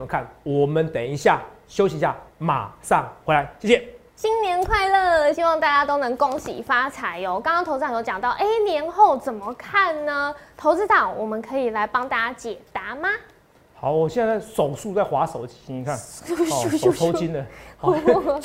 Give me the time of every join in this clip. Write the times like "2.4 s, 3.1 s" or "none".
none